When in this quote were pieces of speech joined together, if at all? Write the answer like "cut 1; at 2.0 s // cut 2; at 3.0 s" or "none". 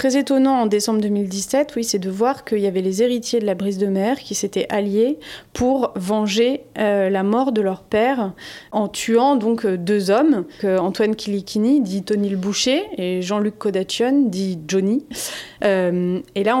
cut 1; at 10.6 s // cut 2; at 15.6 s